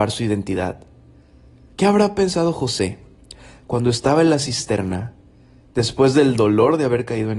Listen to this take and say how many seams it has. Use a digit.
1